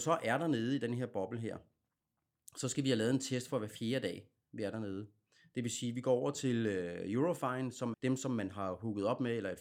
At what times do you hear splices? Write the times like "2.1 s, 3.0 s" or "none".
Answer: 7.9 s